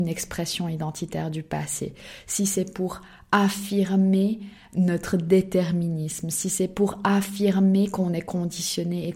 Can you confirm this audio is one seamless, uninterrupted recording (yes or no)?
yes